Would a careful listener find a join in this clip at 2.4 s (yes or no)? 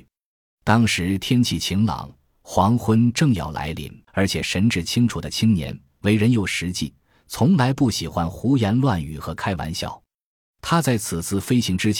no